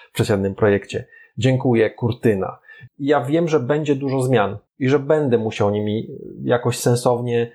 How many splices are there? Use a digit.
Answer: 2